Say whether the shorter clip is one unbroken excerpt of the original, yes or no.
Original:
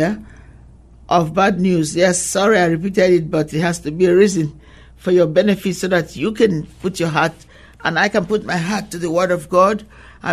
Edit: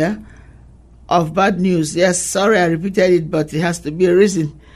yes